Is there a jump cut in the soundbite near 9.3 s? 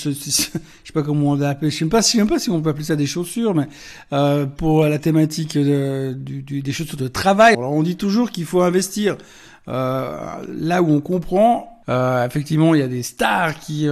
no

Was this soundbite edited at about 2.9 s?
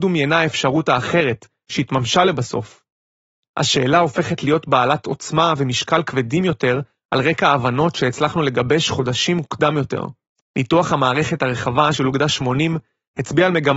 no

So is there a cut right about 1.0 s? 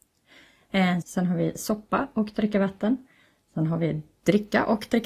yes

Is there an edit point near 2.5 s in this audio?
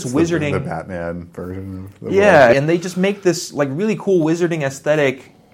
yes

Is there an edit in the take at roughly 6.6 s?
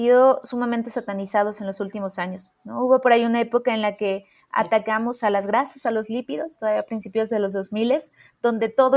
yes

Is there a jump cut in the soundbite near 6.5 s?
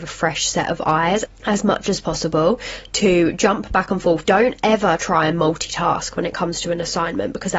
no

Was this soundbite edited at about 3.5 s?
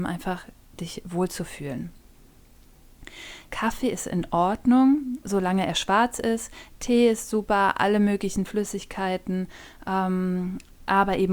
yes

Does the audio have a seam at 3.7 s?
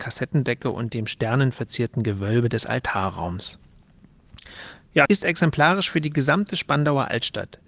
no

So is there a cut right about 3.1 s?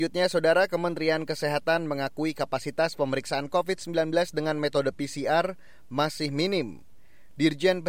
no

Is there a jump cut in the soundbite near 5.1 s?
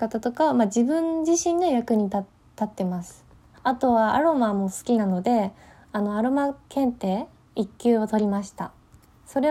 no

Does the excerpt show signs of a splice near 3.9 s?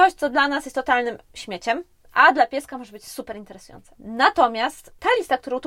yes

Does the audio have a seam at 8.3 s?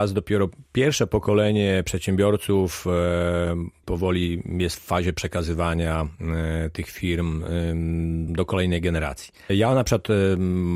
yes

